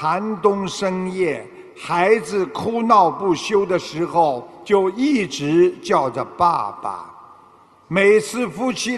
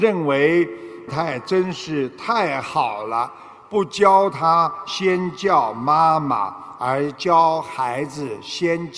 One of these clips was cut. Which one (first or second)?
second